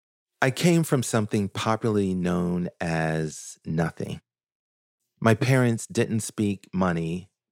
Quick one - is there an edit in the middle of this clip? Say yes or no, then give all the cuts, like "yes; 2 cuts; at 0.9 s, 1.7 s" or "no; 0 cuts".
yes; 1 cut; at 5.0 s